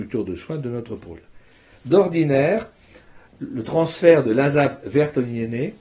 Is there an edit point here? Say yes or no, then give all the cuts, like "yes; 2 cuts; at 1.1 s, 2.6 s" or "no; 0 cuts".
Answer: yes; 2 cuts; at 1.7 s, 3.3 s